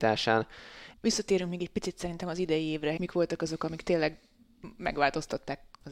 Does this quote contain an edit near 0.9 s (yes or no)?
yes